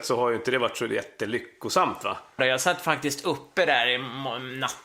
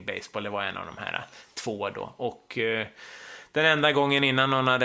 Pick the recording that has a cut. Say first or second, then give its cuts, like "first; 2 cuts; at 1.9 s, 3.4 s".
first; 1 cut; at 2.4 s